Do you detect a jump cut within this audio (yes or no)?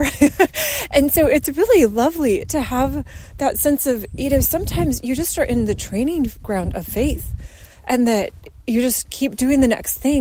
no